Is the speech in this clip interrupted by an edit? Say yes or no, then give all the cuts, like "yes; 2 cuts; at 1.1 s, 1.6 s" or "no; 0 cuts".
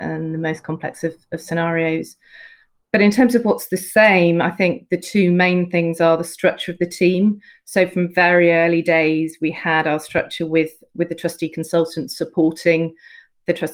no; 0 cuts